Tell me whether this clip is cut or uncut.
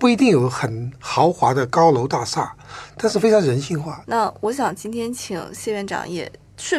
cut